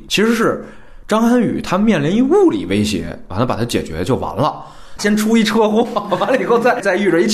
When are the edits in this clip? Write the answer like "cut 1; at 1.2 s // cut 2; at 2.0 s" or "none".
cut 1; at 5.0 s